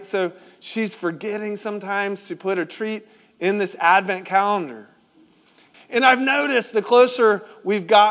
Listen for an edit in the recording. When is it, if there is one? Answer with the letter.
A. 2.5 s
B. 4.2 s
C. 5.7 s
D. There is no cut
C